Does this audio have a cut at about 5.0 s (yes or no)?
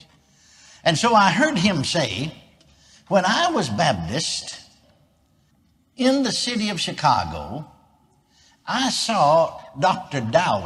no